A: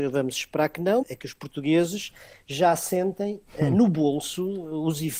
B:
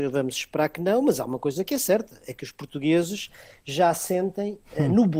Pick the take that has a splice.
A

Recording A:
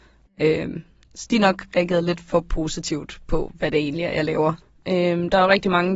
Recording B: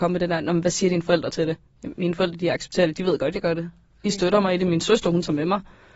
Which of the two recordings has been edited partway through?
A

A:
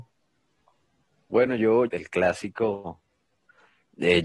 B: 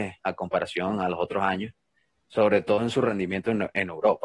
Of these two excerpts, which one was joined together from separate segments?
A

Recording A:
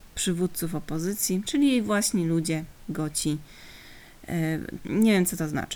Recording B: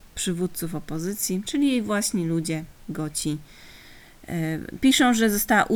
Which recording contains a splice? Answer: A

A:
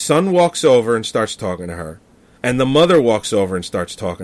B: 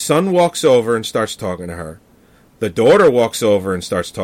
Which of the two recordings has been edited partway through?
A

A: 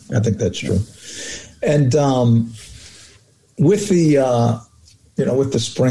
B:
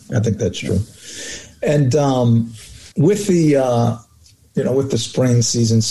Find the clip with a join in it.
B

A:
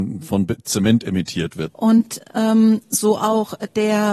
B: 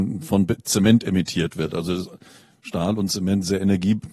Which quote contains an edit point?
A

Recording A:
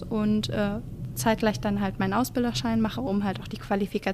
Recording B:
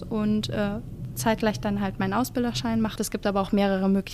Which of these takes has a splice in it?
B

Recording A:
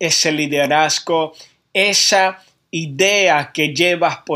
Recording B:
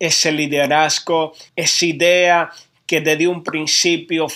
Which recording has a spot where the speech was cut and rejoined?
B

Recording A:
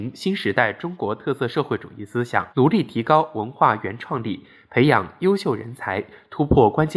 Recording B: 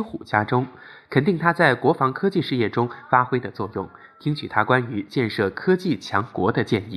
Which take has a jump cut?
A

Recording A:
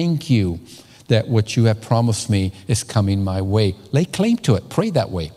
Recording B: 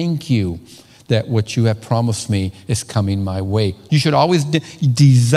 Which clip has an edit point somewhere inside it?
B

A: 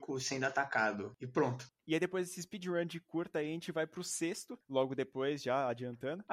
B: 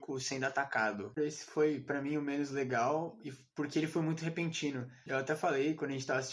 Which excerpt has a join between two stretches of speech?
B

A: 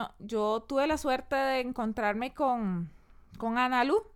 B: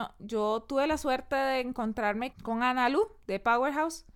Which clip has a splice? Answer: B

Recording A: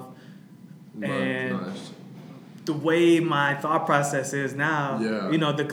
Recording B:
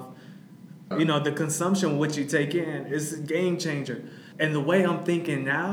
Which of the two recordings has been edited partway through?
B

